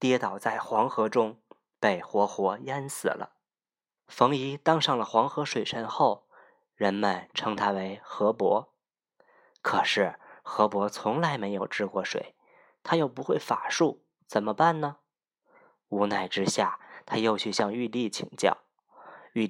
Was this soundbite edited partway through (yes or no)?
yes